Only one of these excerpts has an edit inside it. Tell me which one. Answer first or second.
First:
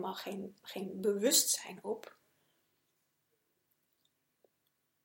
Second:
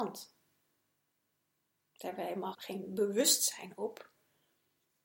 second